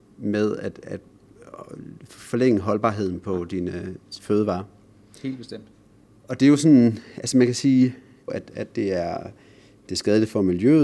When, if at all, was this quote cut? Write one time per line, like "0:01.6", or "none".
0:08.3